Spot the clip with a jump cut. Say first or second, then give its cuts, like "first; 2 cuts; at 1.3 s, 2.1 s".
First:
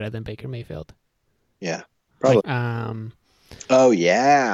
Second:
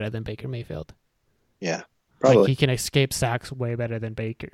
first; 1 cut; at 2.4 s